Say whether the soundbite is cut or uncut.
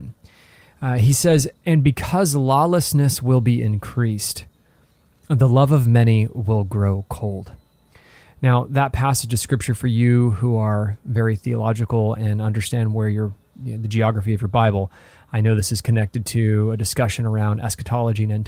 uncut